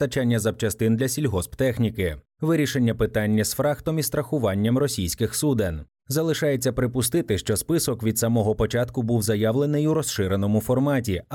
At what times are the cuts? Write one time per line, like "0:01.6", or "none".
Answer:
0:06.0